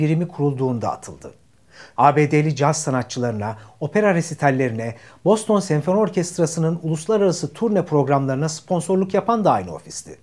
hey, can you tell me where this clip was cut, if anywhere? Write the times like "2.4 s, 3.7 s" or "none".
2.0 s